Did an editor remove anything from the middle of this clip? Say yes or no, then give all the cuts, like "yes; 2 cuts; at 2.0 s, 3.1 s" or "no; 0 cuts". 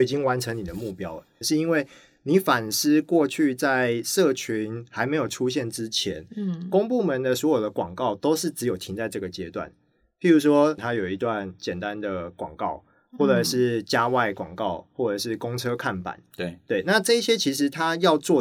yes; 2 cuts; at 1.4 s, 10.8 s